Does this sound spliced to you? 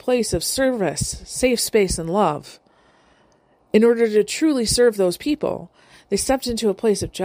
no; 0 cuts

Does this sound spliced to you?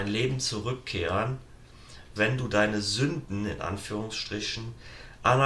yes; 1 cut; at 2.2 s

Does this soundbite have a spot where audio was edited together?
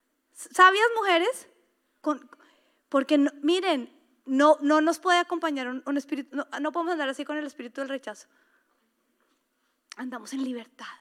no; 0 cuts

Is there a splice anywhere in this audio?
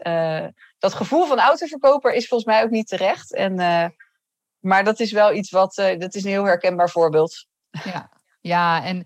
no; 0 cuts

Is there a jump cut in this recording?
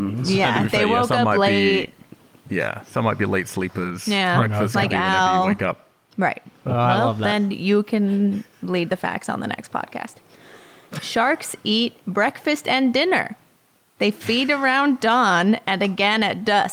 yes; 1 cut; at 6.7 s

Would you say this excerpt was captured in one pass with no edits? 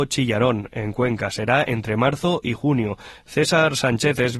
yes; 0 cuts

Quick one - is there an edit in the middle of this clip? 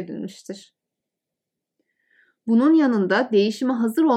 no; 0 cuts

